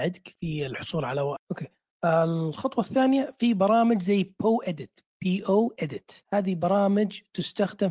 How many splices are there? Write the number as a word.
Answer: two